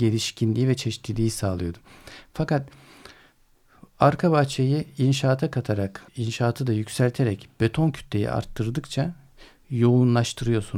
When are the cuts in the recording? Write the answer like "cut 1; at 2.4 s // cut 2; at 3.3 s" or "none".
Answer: cut 1; at 6.1 s